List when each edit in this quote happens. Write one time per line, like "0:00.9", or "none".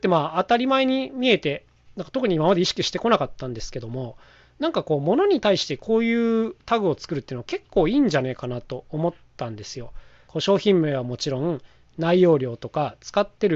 0:10.3